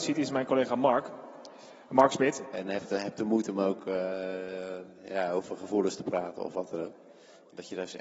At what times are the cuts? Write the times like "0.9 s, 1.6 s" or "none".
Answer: 2.5 s